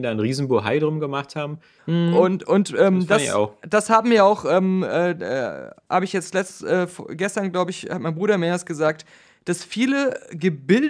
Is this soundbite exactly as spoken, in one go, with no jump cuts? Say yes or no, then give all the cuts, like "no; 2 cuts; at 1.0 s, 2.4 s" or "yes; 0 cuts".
no; 1 cut; at 1.8 s